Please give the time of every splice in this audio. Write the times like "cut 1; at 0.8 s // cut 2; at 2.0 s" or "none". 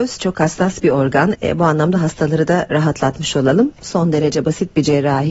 cut 1; at 1.4 s